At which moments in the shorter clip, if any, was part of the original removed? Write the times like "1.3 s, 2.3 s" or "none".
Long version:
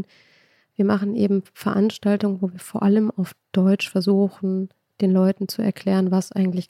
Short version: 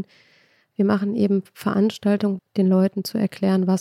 2.4 s